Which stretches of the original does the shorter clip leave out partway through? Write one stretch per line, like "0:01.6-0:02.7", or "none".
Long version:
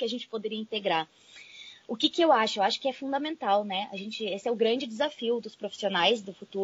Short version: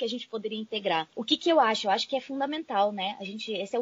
0:01.1-0:01.8